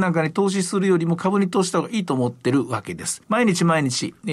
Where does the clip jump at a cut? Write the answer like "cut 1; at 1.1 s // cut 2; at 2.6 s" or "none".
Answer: cut 1; at 3.2 s